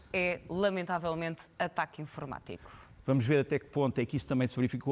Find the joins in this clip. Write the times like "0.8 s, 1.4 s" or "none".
3.0 s